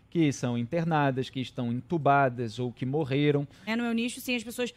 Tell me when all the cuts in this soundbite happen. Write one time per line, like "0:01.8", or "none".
0:03.7